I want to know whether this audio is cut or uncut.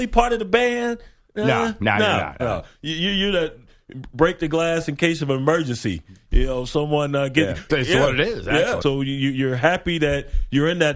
cut